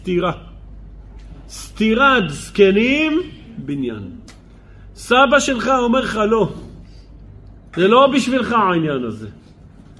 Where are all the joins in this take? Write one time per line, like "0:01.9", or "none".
0:07.7

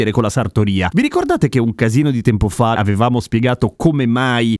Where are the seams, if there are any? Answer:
0:00.9
0:02.7

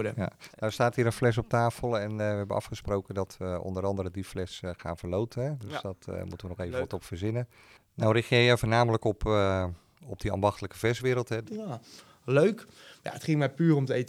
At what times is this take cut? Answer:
0:11.4

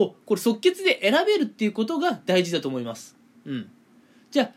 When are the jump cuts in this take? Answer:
none

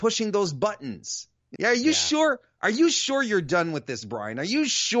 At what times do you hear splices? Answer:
0:01.6

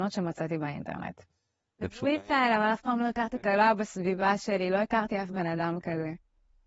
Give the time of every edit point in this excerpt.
0:01.8
0:03.4

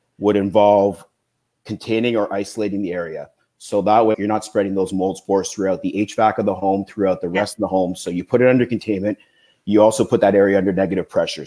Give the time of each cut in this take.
0:04.1

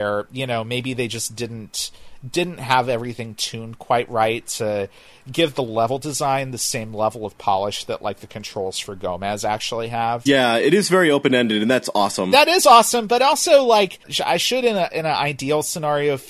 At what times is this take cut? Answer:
0:10.3

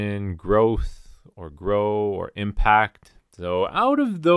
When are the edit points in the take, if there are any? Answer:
0:03.2

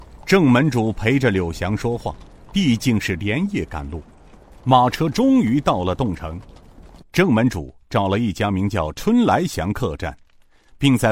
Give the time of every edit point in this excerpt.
0:04.5
0:07.0

